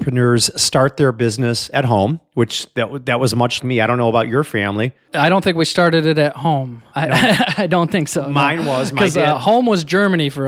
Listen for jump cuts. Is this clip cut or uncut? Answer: cut